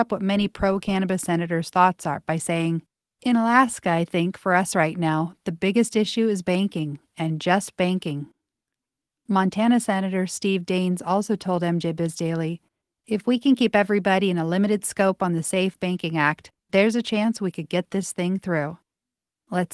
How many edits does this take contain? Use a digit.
0